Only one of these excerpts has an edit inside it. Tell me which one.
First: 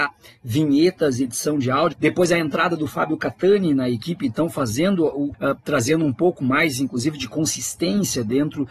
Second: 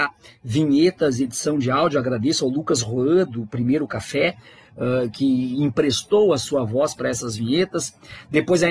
first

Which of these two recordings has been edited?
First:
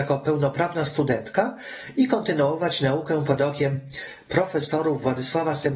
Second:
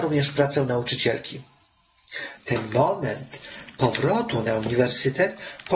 second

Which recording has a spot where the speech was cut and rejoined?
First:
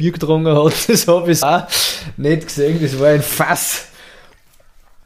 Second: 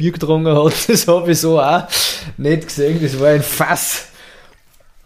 first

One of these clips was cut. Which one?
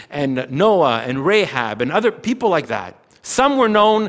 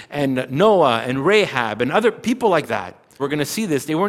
second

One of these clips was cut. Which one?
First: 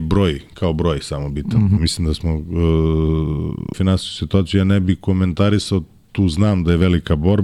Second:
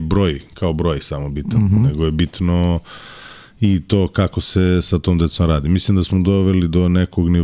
first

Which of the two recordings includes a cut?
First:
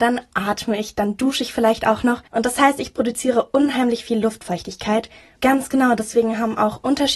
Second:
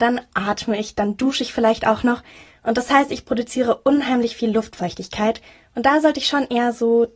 first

